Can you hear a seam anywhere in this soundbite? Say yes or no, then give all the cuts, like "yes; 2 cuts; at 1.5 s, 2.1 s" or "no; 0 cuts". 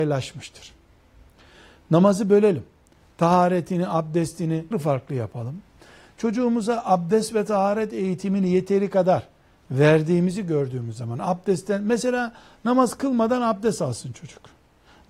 yes; 1 cut; at 4.7 s